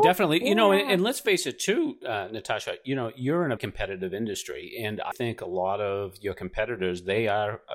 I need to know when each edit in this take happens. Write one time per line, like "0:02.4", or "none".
0:03.6
0:05.1